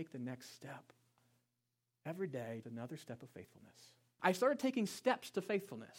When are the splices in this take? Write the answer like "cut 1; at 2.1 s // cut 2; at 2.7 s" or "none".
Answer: cut 1; at 2.6 s // cut 2; at 4.2 s

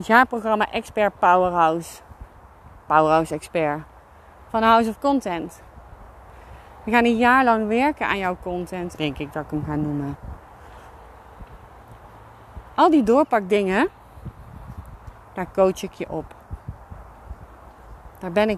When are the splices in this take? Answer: cut 1; at 8.9 s

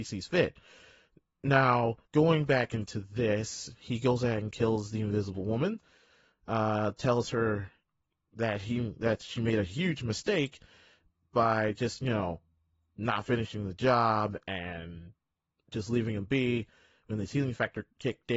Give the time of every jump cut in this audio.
cut 1; at 2.0 s

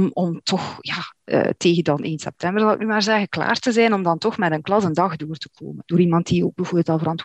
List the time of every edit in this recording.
cut 1; at 5.8 s

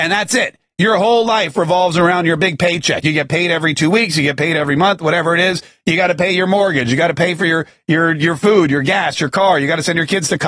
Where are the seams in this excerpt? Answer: none

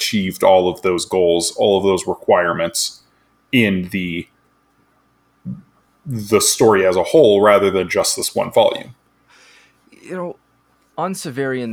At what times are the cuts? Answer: none

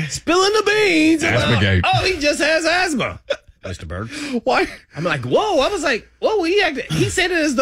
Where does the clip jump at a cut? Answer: none

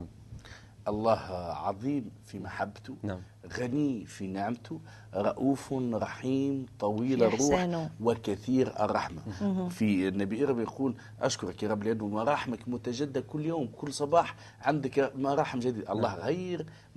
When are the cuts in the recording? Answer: none

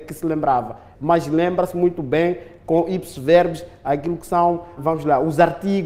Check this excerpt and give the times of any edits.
cut 1; at 0.9 s // cut 2; at 4.8 s

